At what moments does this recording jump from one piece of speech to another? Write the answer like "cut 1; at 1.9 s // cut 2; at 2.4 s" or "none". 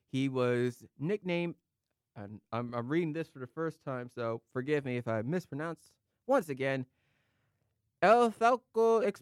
none